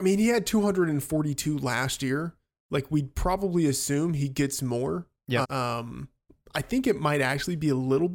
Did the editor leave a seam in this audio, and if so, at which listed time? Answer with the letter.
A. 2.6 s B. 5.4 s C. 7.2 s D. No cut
B